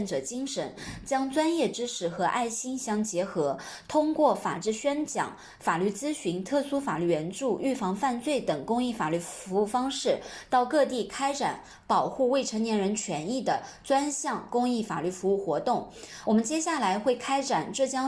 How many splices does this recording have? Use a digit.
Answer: 0